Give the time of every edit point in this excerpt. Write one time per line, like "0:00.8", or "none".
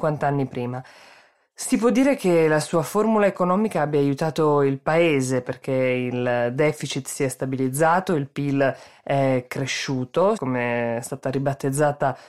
0:10.4